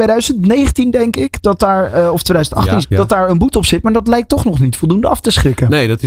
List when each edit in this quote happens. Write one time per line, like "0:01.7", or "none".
0:02.8